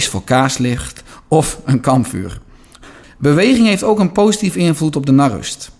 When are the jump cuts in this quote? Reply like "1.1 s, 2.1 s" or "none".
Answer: 3.0 s